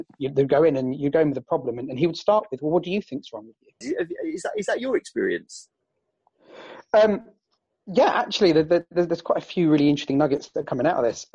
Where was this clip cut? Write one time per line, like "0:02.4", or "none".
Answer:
0:03.8